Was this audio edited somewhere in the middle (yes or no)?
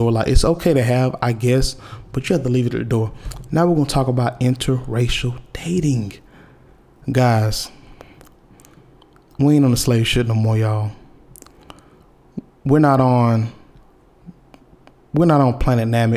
no